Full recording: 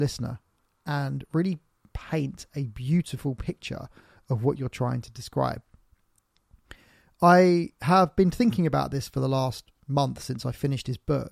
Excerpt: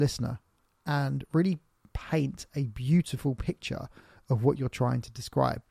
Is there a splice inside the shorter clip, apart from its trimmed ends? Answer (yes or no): no